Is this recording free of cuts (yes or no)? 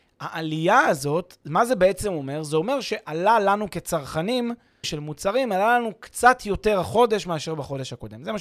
no